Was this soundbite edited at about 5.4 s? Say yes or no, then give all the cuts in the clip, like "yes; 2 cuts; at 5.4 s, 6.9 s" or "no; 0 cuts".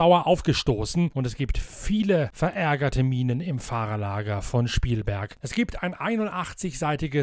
yes; 1 cut; at 5.4 s